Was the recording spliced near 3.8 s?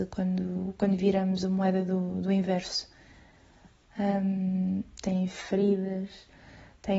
yes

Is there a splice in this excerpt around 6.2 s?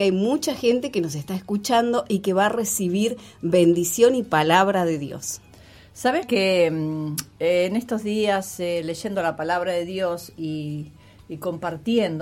yes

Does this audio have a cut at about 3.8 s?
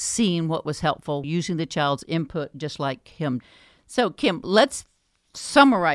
no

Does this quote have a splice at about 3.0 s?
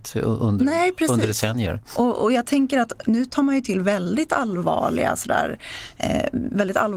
yes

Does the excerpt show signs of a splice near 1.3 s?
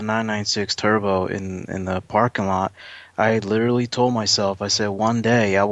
no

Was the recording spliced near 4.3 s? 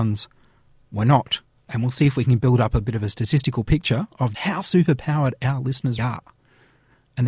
yes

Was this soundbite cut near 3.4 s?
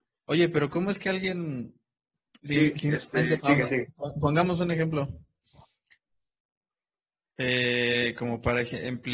yes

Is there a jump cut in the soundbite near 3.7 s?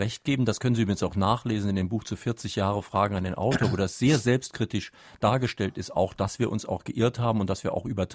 no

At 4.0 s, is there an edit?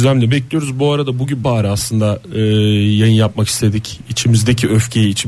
no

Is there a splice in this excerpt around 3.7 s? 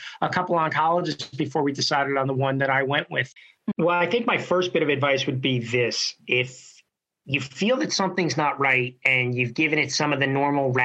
yes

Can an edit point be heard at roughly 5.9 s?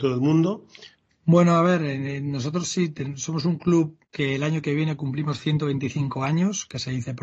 no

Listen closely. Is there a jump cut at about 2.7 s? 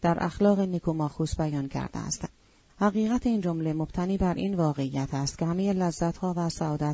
yes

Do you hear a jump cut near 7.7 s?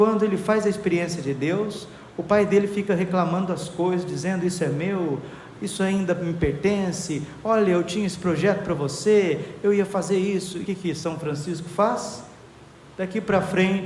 no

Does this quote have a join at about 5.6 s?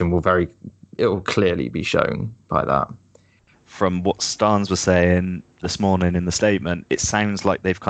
yes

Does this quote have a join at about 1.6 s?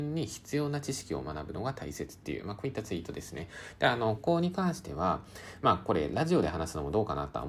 no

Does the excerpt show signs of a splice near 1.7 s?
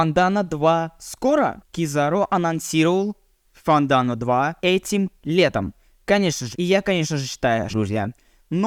no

